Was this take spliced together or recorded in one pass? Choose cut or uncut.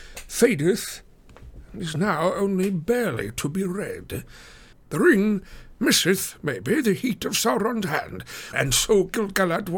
cut